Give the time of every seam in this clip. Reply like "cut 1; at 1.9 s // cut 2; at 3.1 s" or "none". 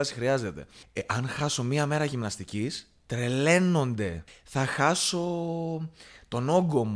none